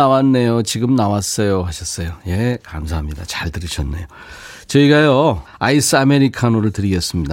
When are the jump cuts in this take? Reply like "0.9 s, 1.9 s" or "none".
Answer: 5.5 s

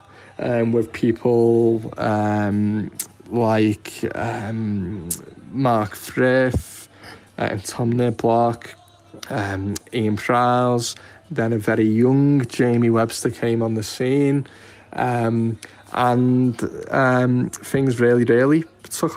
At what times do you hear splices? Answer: none

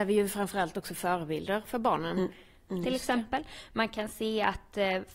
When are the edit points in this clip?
2.7 s

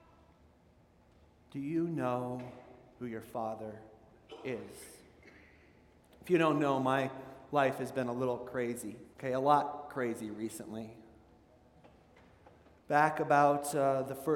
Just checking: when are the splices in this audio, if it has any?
9.1 s

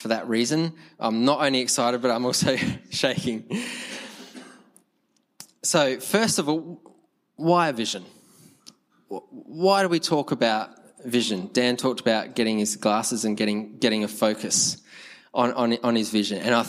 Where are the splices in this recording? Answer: none

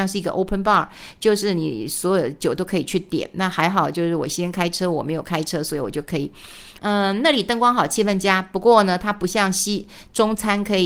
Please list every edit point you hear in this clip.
6.8 s

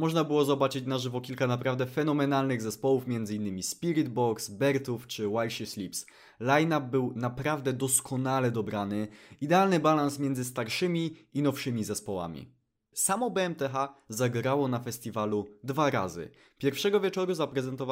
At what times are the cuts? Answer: 12.9 s

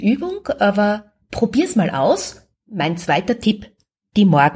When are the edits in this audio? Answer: 2.6 s

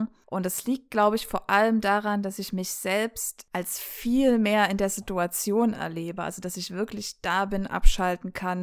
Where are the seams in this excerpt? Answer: none

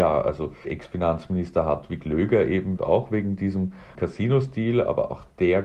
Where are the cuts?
2.8 s

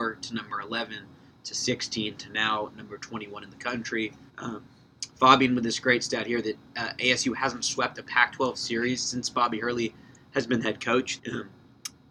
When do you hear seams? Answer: 4.3 s, 11.2 s

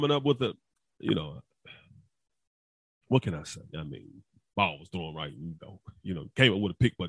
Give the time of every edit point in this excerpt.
5.5 s

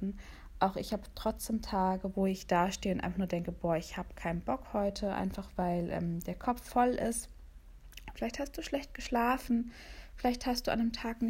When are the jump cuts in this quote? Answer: 2.1 s, 8.1 s

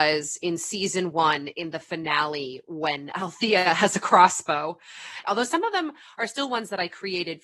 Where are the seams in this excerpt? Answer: 5.2 s

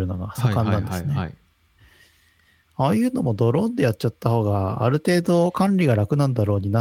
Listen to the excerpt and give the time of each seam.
none

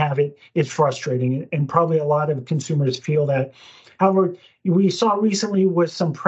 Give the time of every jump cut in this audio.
none

